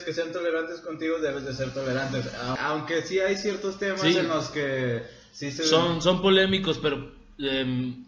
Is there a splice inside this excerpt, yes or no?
yes